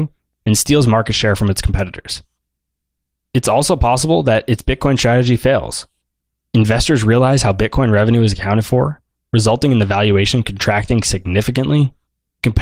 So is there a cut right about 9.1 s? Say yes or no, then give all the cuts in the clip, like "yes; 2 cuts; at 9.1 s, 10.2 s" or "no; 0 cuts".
no; 0 cuts